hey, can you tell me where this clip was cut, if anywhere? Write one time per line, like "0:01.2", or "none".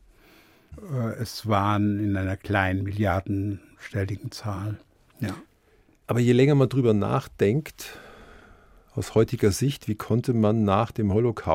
none